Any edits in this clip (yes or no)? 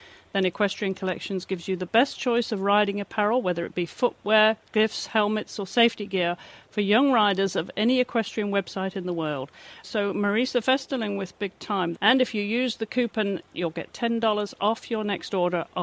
yes